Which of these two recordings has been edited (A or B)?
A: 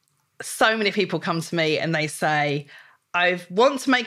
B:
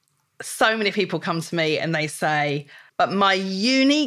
B